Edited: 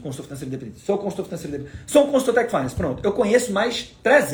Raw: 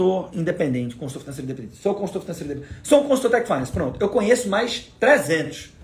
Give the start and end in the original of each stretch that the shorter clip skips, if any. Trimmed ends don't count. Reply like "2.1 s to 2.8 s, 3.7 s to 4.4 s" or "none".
none